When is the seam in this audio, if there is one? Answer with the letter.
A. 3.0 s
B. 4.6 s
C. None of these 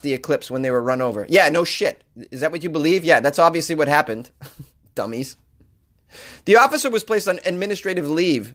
C